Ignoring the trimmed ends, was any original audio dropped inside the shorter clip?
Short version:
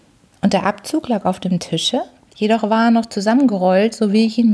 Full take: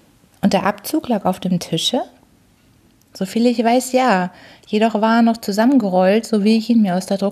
yes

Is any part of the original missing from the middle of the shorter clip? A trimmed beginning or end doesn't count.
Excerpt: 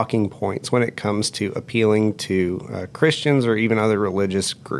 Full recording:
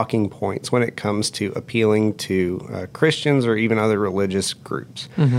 no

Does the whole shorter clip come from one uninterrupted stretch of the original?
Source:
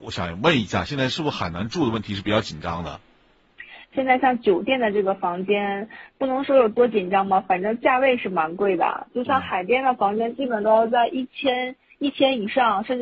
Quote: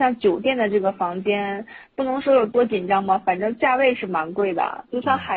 yes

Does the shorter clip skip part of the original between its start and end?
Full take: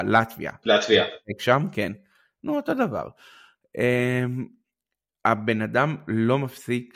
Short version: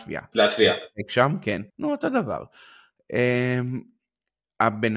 yes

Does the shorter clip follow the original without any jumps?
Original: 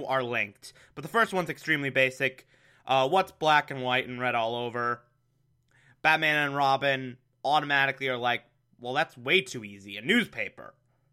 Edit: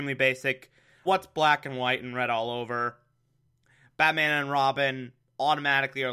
no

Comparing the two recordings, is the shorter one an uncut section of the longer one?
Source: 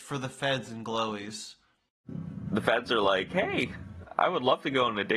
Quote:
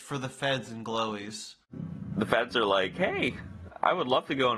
no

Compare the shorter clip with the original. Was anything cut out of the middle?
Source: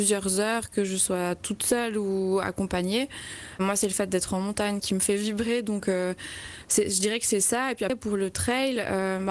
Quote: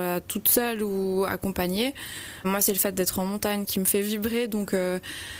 no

